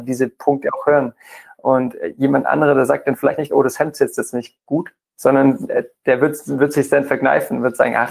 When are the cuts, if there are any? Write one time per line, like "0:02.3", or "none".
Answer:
none

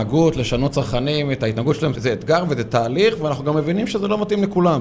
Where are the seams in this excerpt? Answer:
0:01.9

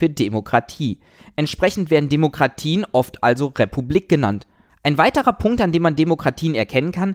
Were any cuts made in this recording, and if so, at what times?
0:04.7

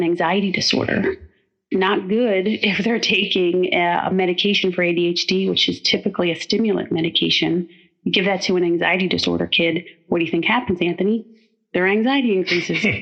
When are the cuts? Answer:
none

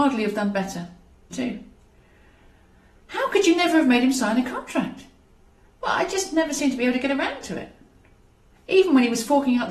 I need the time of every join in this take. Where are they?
0:01.3

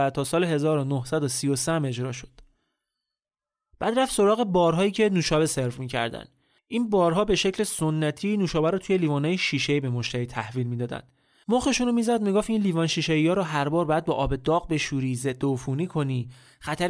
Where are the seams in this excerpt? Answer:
0:11.4

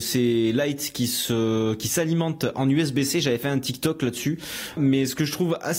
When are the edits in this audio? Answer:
0:04.8

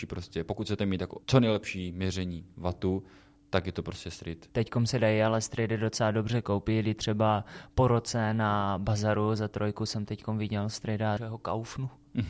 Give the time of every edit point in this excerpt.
0:01.2
0:04.5
0:11.2

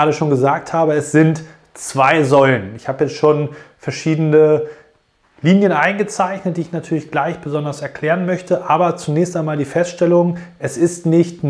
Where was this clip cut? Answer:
none

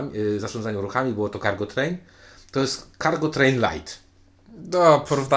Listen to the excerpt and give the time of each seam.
none

